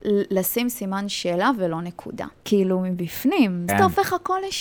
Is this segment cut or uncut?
cut